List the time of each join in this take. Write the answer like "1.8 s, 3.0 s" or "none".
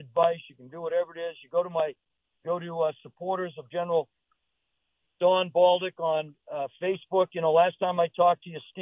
none